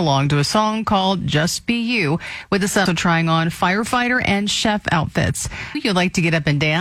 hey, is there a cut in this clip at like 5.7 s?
yes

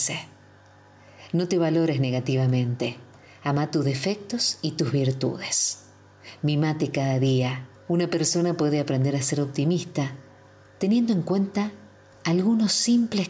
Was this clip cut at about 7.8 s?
yes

